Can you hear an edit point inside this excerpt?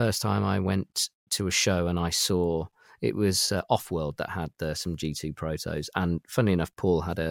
no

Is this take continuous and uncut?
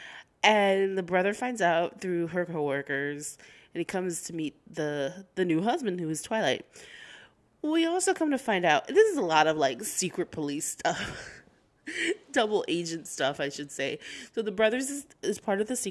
yes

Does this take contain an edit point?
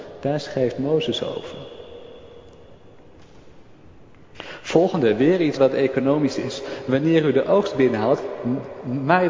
yes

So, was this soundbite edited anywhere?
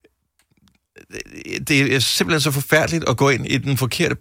no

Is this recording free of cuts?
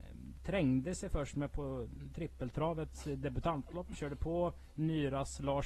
yes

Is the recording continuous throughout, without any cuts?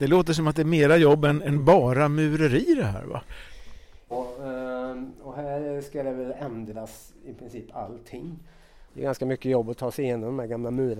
no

